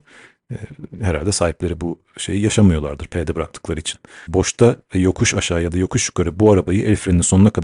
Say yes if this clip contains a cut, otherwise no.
yes